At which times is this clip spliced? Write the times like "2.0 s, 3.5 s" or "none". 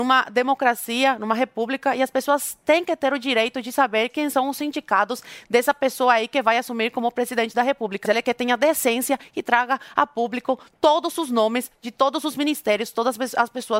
8.0 s